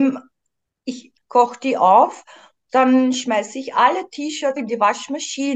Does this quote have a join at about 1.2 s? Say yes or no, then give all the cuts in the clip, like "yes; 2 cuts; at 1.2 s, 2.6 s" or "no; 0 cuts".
yes; 2 cuts; at 1.2 s, 4.6 s